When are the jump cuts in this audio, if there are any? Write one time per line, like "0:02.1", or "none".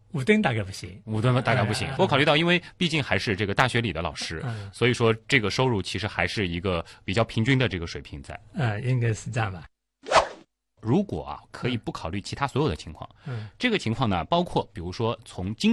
0:01.9